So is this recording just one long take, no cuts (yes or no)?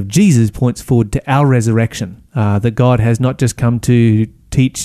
no